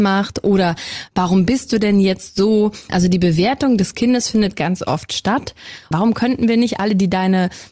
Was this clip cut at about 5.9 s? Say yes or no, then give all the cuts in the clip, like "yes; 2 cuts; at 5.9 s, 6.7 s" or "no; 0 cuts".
yes; 2 cuts; at 2.9 s, 5.9 s